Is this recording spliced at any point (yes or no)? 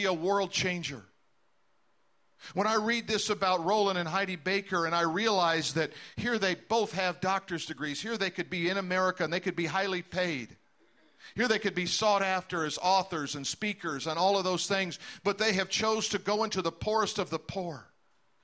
no